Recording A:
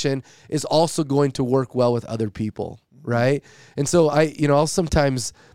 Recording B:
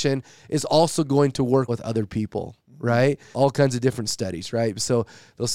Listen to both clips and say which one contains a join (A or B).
B